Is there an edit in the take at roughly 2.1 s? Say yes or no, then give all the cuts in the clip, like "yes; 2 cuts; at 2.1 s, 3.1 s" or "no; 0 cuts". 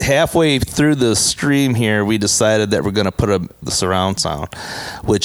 no; 1 cut; at 3.6 s